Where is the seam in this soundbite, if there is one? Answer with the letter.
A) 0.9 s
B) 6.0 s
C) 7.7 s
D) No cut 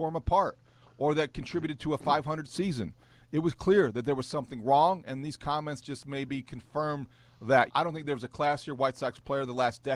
C